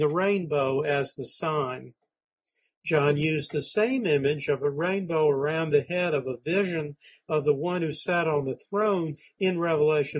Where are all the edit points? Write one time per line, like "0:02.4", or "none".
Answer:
none